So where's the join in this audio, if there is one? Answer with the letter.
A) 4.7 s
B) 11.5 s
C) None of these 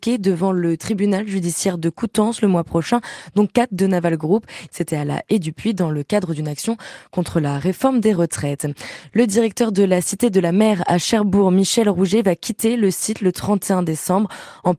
A